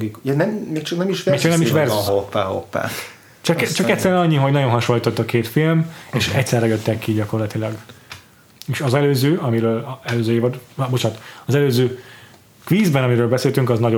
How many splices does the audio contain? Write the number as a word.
one